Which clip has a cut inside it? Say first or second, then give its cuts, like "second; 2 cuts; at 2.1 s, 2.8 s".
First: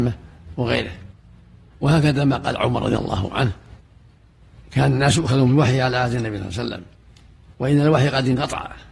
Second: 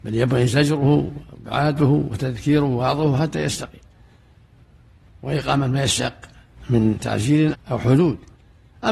second; 1 cut; at 7.5 s